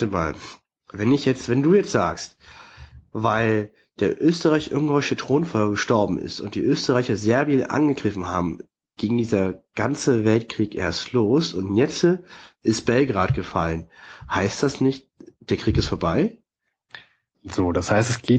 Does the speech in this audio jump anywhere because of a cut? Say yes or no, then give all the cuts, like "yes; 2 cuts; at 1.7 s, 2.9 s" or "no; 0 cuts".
yes; 1 cut; at 17.3 s